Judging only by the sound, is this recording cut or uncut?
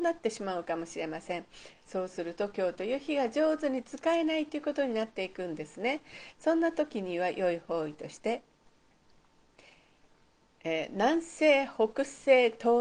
uncut